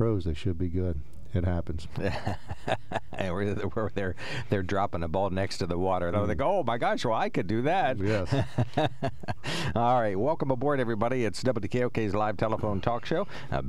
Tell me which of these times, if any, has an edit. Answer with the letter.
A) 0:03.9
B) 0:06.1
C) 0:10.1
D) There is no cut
B